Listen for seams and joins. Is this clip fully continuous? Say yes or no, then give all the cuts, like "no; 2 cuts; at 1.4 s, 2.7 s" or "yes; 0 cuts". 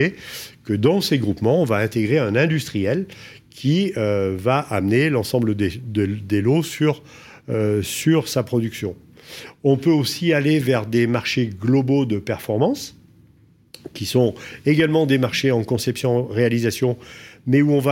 yes; 0 cuts